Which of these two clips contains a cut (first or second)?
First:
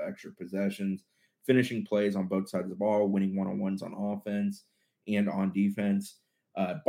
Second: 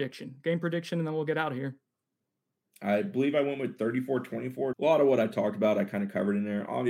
second